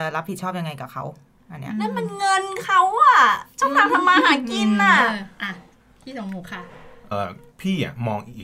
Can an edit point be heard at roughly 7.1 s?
yes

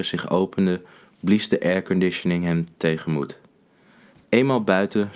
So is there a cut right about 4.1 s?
yes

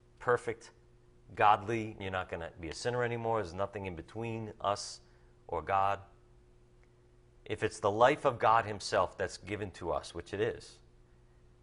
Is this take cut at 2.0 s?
yes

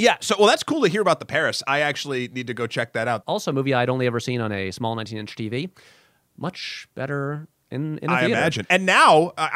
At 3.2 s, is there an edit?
yes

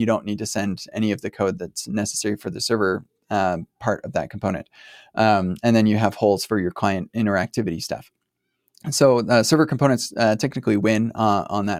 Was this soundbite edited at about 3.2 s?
no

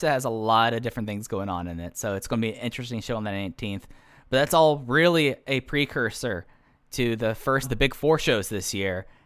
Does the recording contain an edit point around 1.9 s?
no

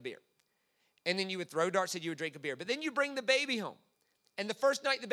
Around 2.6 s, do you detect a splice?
no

